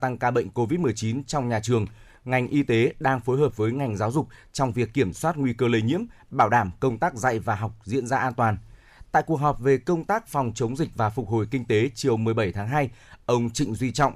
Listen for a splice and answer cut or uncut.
uncut